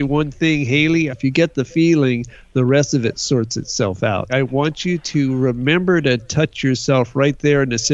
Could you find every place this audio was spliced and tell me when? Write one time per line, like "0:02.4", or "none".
0:01.1
0:04.3